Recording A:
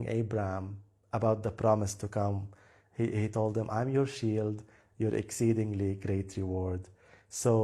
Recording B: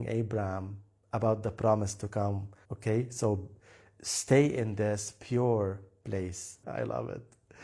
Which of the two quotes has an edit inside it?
B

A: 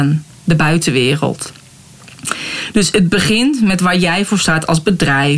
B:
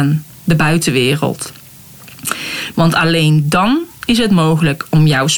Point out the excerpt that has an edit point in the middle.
B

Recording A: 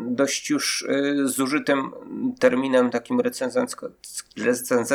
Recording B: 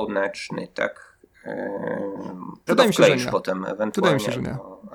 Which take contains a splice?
B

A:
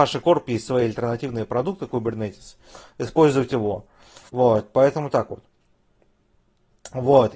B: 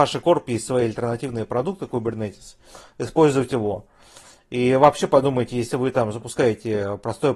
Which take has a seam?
A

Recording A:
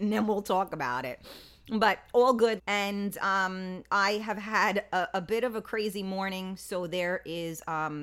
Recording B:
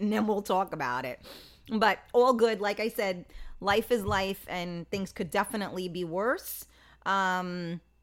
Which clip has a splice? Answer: A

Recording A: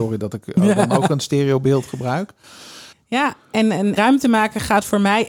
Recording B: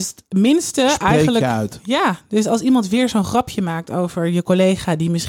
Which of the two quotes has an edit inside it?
A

